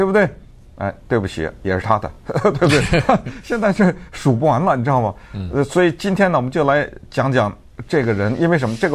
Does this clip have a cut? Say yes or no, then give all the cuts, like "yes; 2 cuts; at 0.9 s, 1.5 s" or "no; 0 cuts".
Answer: no; 0 cuts